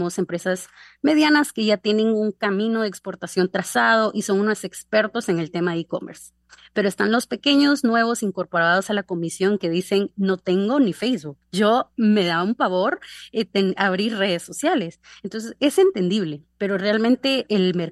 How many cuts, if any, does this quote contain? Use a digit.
0